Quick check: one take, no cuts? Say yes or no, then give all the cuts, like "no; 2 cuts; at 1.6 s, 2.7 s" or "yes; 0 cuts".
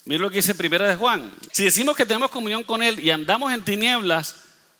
no; 1 cut; at 1.5 s